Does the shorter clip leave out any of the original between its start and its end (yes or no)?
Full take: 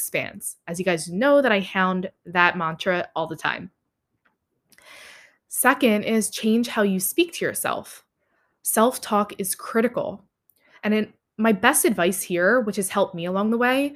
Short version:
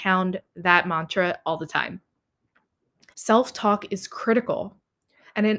yes